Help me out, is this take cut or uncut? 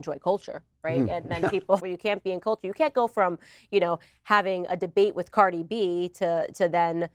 cut